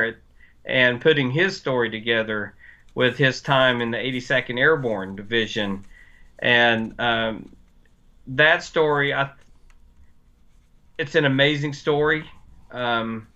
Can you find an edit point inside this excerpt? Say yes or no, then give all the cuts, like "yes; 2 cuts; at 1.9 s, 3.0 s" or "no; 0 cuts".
no; 0 cuts